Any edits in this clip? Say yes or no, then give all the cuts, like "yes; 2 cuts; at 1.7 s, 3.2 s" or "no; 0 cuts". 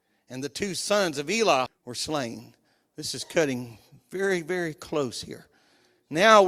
yes; 1 cut; at 1.7 s